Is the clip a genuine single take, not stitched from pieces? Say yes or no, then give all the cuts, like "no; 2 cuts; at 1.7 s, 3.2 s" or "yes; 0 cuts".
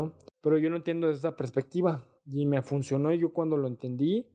yes; 0 cuts